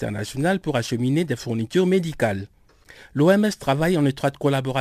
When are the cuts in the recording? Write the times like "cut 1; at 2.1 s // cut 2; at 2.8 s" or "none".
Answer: none